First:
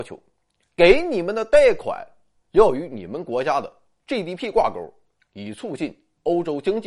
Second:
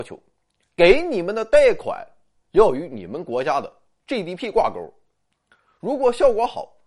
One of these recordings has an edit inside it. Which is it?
first; 1 cut; at 5.2 s

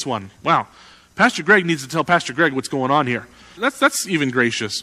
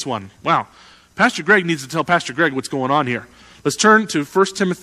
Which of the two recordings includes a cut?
first; 1 cut; at 3.6 s

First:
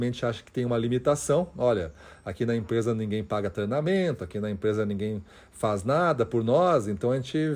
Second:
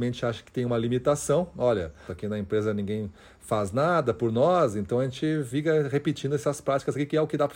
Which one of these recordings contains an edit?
second; 1 cut; at 2.1 s

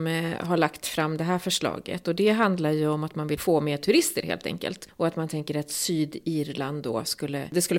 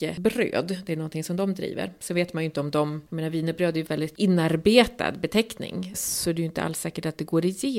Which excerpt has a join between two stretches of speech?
second; 1 cut; at 3.9 s

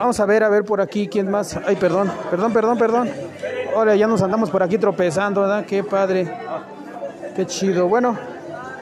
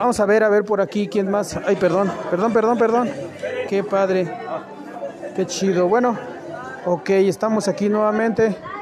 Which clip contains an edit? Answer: second; 1 cut; at 3.7 s

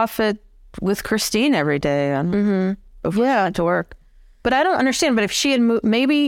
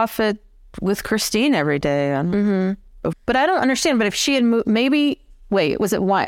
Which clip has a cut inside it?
second; 1 cut; at 3.1 s

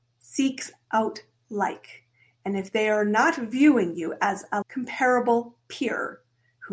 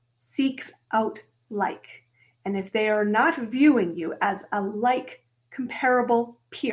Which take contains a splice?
first; 1 cut; at 4.6 s

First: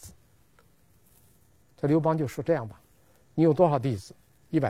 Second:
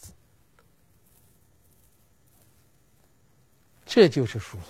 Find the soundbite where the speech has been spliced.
first; 1 cut; at 1.6 s

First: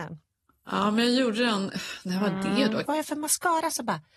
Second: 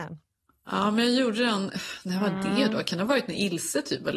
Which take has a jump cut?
first; 1 cut; at 2.8 s

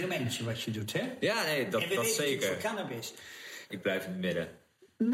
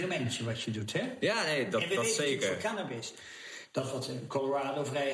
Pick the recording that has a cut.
first; 1 cut; at 3.7 s

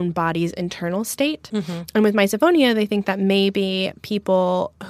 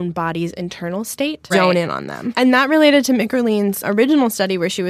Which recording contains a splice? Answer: second; 1 cut; at 1.5 s

